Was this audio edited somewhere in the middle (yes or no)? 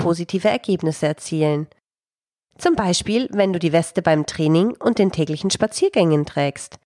no